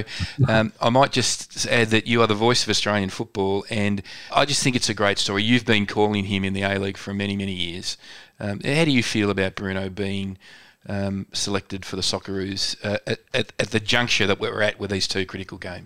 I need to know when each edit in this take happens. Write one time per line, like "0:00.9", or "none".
0:04.3